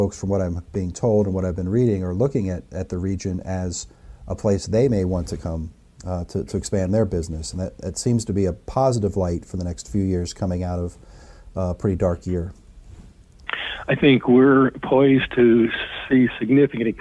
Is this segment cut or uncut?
uncut